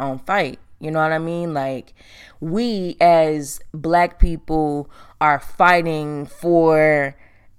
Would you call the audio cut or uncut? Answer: uncut